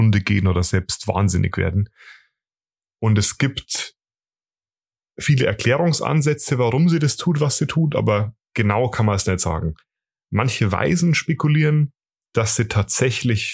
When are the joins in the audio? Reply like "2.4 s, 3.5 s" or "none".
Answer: none